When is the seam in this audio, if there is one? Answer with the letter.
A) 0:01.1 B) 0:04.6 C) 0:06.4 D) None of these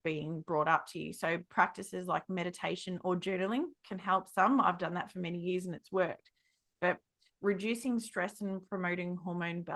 D